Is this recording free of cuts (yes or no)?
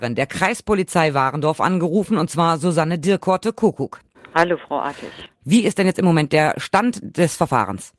yes